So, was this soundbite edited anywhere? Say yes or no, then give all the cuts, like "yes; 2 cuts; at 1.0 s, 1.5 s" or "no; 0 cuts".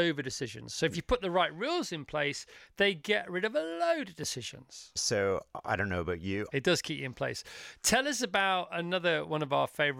yes; 2 cuts; at 5.0 s, 6.5 s